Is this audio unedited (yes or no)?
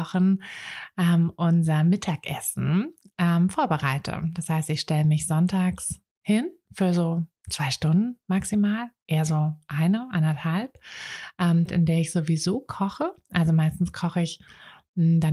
no